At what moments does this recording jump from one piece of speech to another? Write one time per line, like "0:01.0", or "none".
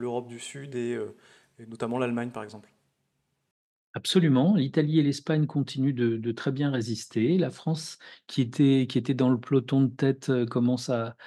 none